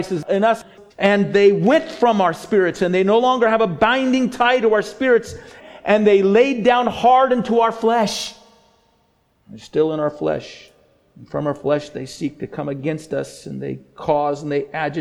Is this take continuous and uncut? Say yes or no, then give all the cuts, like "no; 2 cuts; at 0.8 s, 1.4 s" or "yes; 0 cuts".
no; 1 cut; at 0.9 s